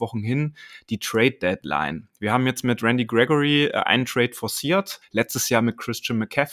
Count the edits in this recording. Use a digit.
1